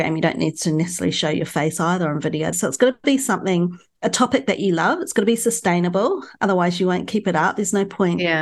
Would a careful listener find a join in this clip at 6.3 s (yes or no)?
no